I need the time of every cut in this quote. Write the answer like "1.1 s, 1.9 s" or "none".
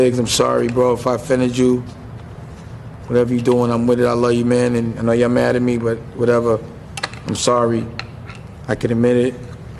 none